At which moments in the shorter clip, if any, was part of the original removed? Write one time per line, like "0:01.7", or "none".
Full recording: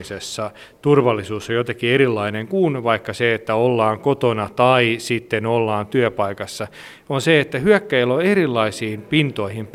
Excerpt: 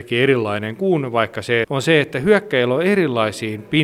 0:01.6